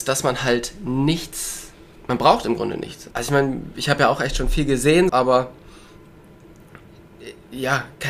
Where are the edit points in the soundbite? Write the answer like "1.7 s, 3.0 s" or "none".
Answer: 3.1 s, 5.1 s